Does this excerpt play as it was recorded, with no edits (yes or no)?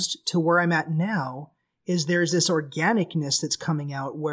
yes